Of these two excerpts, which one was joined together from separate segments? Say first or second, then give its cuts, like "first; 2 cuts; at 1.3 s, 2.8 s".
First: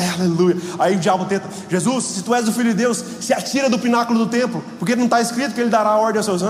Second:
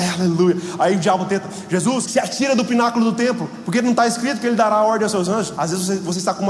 second; 2 cuts; at 2.0 s, 5.6 s